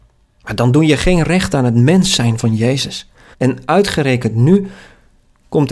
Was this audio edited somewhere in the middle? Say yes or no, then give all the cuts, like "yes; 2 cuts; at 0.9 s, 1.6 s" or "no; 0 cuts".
yes; 1 cut; at 3.3 s